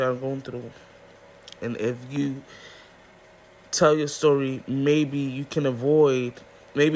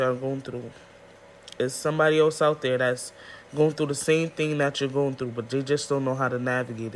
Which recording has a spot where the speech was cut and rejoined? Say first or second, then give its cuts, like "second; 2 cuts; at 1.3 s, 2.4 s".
first; 1 cut; at 1.6 s